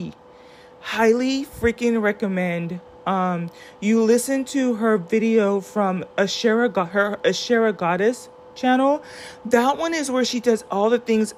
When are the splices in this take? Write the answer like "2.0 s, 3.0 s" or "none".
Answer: none